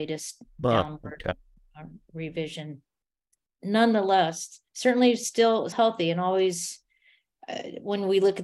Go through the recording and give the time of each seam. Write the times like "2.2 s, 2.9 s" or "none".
4.7 s, 5.7 s